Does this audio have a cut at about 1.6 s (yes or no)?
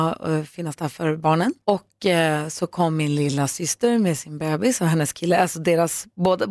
yes